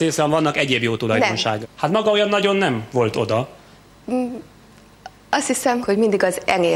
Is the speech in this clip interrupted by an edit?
yes; 2 cuts; at 1.6 s, 5.8 s

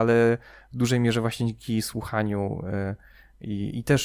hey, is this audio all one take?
yes; 0 cuts

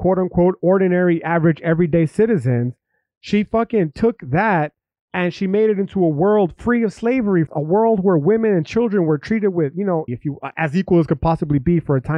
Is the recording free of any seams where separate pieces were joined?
no; 2 cuts; at 7.5 s, 10.1 s

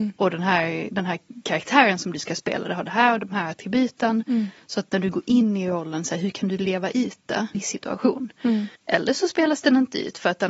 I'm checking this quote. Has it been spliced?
yes; 2 cuts; at 7.5 s, 8.8 s

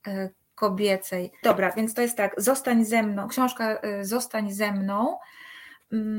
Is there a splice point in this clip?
yes; 1 cut; at 1.4 s

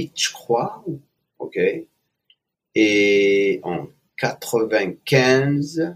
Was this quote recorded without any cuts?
no; 1 cut; at 1.2 s

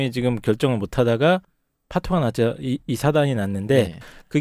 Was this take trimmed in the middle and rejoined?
no; 0 cuts

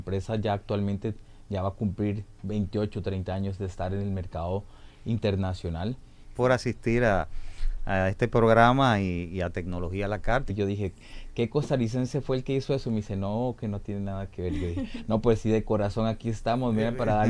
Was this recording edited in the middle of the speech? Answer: yes; 2 cuts; at 6.3 s, 10.5 s

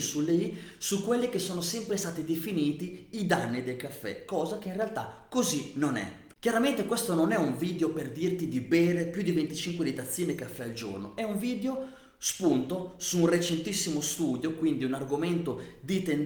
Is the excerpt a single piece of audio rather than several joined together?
no; 1 cut; at 6.3 s

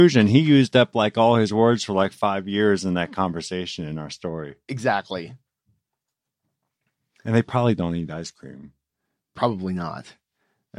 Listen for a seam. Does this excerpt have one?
no; 0 cuts

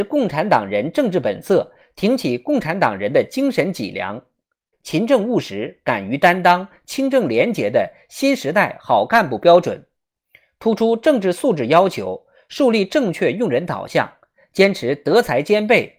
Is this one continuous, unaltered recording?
no; 1 cut; at 4.7 s

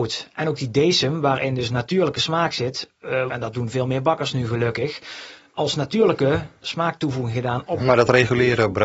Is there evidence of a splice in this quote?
yes; 2 cuts; at 3.3 s, 7.8 s

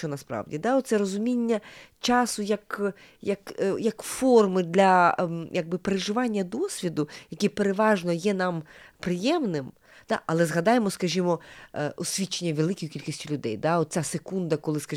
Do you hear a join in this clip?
no; 0 cuts

